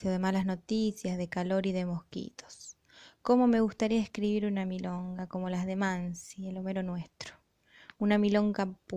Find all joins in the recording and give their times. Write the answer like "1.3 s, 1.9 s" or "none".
none